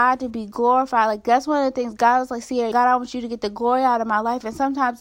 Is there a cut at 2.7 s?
yes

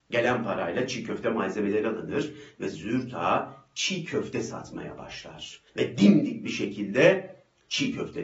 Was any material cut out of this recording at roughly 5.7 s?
yes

